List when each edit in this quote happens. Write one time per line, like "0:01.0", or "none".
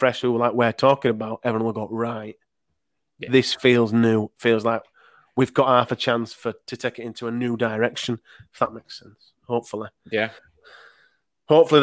none